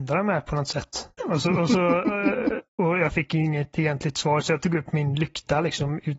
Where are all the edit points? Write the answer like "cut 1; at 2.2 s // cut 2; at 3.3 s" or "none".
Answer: cut 1; at 1.2 s // cut 2; at 2.7 s